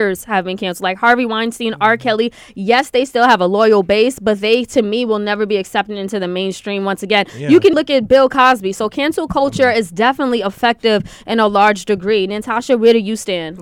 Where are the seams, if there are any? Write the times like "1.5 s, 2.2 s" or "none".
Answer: 7.7 s